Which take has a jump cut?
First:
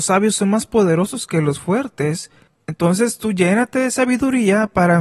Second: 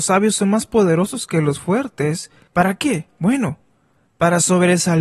second; 1 cut; at 2.5 s

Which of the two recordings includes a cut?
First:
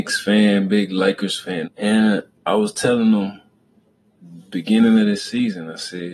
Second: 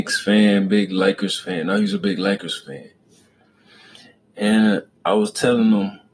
first; 1 cut; at 1.6 s

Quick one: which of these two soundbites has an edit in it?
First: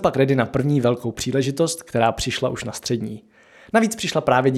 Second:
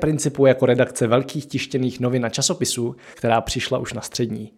second; 1 cut; at 3.1 s

